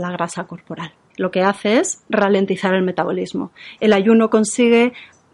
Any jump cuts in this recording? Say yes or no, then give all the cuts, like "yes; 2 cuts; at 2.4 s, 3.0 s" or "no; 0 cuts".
yes; 2 cuts; at 1.1 s, 3.8 s